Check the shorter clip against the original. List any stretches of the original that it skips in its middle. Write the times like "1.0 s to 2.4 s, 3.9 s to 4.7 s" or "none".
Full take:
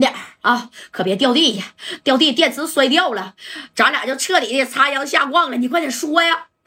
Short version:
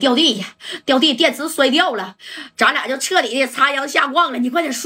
none